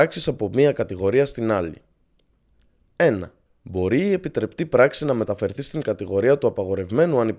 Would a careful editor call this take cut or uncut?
cut